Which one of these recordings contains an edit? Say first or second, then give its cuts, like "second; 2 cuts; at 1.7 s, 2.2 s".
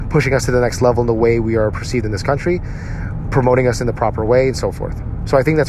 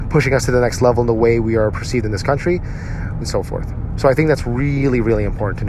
second; 1 cut; at 3.2 s